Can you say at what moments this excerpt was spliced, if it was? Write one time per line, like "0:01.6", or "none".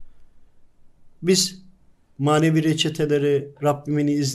none